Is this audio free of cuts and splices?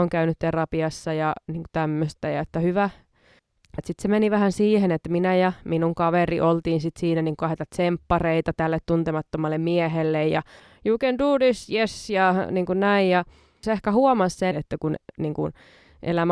no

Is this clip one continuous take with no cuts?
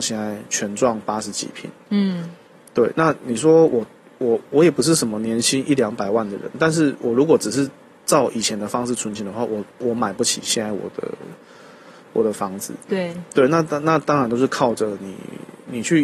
yes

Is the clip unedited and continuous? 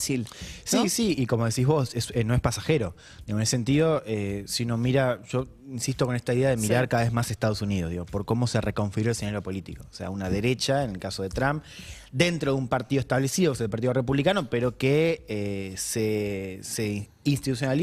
yes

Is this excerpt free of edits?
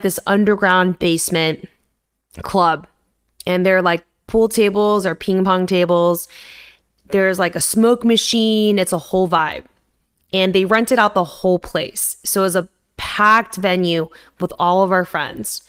yes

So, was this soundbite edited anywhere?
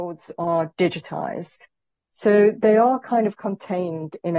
no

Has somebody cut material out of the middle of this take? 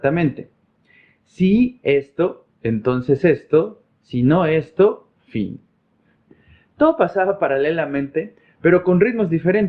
yes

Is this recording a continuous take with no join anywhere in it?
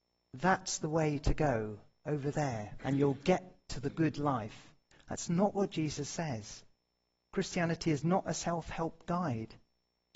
no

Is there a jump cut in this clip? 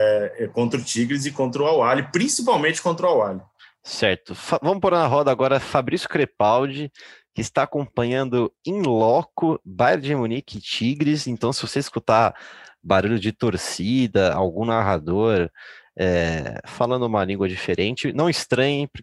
no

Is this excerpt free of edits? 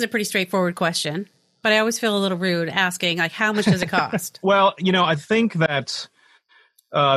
no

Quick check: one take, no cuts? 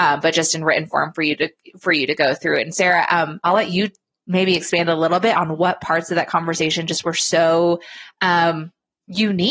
yes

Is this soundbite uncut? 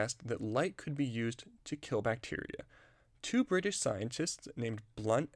yes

